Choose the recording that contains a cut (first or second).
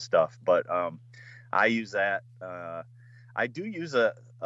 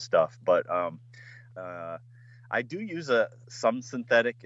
second